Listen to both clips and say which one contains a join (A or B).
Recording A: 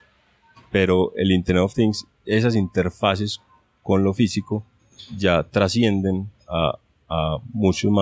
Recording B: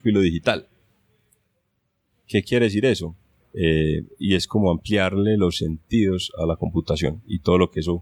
B